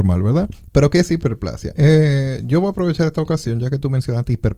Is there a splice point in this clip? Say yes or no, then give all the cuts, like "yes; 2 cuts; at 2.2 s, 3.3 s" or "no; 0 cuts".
yes; 1 cut; at 1.8 s